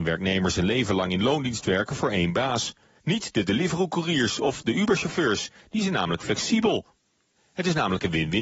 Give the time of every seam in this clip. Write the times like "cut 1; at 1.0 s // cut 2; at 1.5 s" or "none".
cut 1; at 3.0 s // cut 2; at 7.3 s